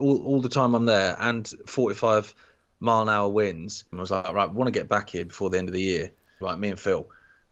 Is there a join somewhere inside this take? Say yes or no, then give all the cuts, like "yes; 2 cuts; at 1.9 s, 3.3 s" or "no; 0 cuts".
yes; 2 cuts; at 3.9 s, 6.4 s